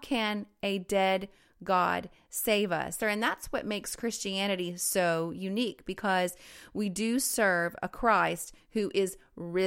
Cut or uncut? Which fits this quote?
cut